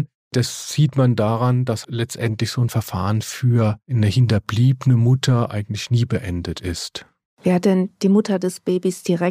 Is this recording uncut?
no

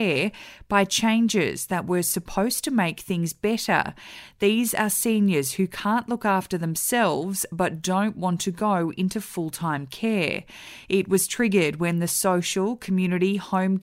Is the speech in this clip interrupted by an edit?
no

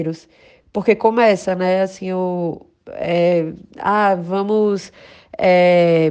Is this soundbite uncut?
yes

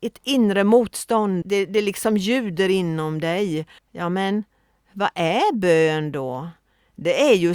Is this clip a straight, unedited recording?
no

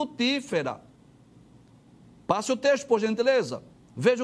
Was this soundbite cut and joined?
no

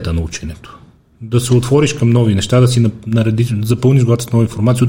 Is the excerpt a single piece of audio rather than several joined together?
yes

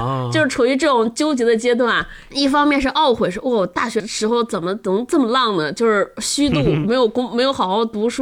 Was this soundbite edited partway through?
yes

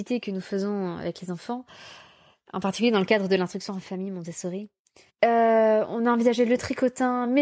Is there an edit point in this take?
yes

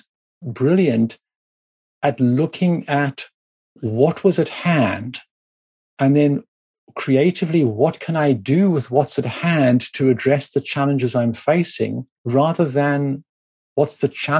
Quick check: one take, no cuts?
yes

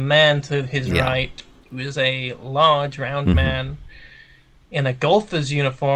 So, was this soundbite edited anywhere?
no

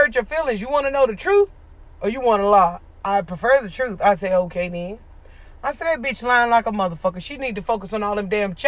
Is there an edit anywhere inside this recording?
no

